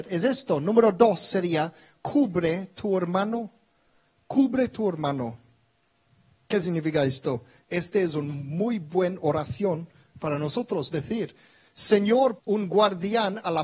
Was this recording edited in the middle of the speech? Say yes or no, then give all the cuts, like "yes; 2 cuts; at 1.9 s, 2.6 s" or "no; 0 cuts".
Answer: yes; 2 cuts; at 7.6 s, 12.4 s